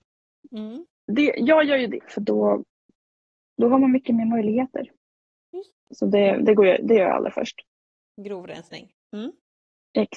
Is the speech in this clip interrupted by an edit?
yes; 2 cuts; at 2.0 s, 5.9 s

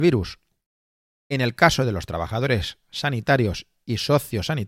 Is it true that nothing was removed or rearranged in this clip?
yes; 0 cuts

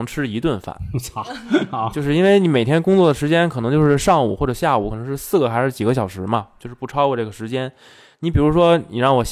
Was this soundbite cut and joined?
no; 0 cuts

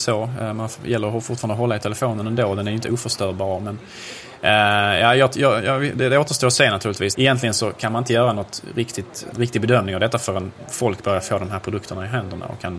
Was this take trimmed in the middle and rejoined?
yes; 2 cuts; at 7.1 s, 9.3 s

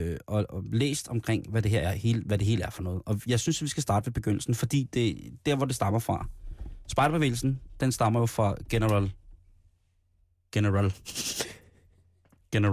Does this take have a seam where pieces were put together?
no; 0 cuts

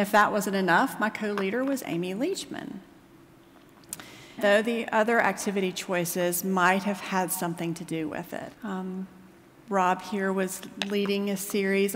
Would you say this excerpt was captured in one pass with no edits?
no; 2 cuts; at 4.4 s, 8.5 s

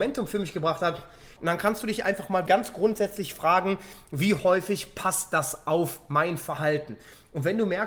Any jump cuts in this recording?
yes; 2 cuts; at 1.4 s, 2.5 s

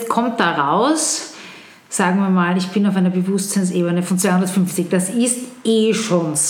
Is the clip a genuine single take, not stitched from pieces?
yes; 0 cuts

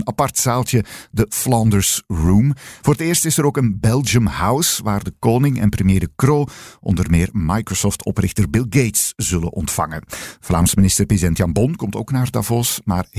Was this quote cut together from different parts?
yes; 1 cut; at 2.8 s

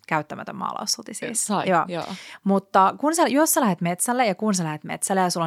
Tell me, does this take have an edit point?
no; 0 cuts

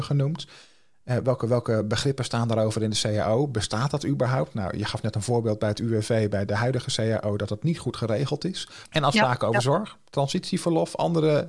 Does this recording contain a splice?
yes; 2 cuts; at 6.5 s, 8.8 s

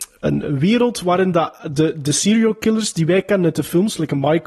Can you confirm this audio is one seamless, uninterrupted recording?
yes; 0 cuts

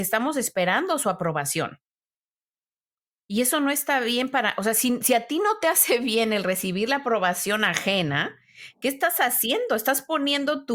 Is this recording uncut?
yes; 0 cuts

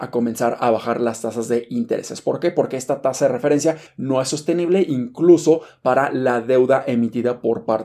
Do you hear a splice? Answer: yes; 1 cut; at 3.9 s

